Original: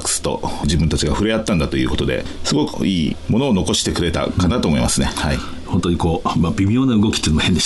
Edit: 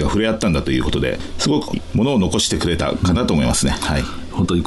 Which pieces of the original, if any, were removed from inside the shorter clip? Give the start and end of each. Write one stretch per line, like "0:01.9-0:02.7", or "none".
0:02.8-0:03.1